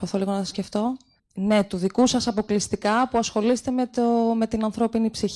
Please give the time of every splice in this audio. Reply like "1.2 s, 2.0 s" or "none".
1.2 s